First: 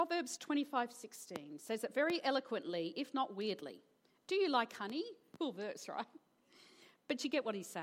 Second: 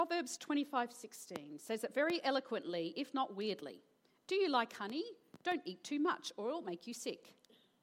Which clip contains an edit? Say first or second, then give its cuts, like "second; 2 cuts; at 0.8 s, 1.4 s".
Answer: first; 1 cut; at 5.4 s